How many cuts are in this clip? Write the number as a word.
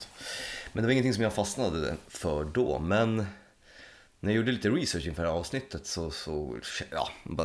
zero